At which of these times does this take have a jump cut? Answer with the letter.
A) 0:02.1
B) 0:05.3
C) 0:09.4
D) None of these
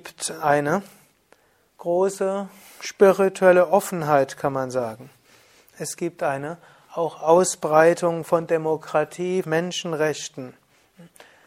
C